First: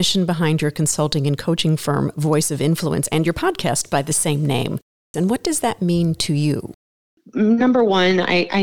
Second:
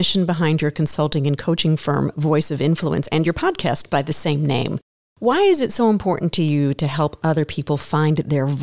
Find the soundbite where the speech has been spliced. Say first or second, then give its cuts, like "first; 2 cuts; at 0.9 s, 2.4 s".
first; 1 cut; at 5.1 s